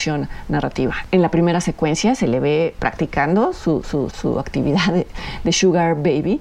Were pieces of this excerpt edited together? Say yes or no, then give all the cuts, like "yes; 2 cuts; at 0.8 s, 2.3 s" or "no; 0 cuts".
yes; 1 cut; at 4.1 s